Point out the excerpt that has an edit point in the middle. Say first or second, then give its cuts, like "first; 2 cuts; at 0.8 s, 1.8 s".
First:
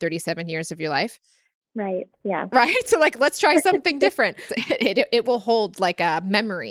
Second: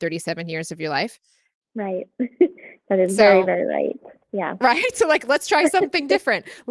first; 2 cuts; at 2.1 s, 4.5 s